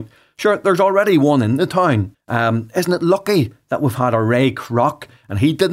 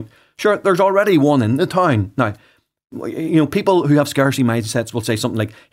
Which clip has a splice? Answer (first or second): first